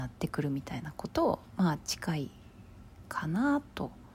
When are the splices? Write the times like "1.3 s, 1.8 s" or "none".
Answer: 1.1 s